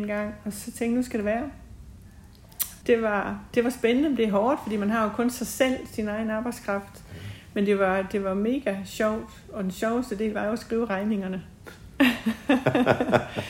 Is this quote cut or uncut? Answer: cut